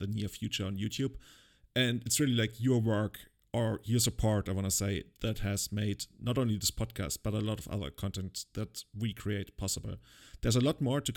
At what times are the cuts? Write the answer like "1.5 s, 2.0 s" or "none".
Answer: none